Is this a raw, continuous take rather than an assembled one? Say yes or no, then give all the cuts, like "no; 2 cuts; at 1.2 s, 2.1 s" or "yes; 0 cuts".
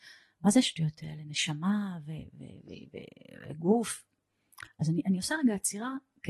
yes; 0 cuts